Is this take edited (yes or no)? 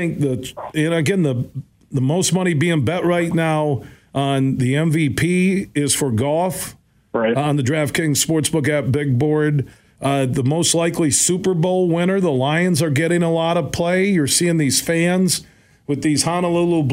no